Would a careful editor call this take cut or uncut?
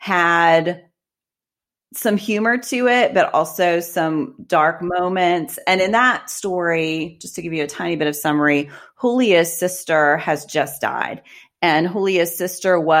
uncut